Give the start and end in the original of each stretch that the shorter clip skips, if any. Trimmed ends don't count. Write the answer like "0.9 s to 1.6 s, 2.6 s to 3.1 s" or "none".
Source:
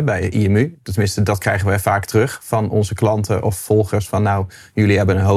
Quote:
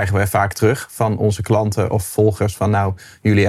none